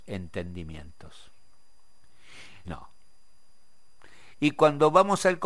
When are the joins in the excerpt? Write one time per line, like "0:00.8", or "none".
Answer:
0:02.6
0:04.4

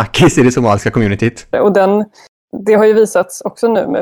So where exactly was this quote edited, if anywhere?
0:01.5

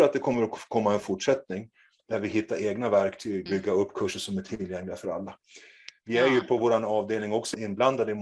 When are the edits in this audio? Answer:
0:03.5

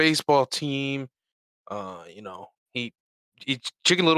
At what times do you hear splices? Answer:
0:02.5

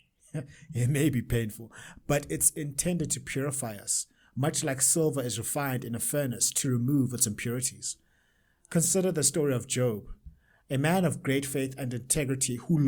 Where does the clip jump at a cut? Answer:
none

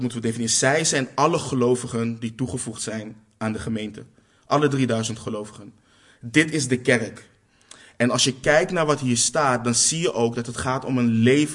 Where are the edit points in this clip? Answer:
none

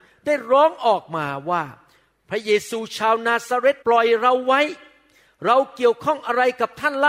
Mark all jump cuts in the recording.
0:03.8

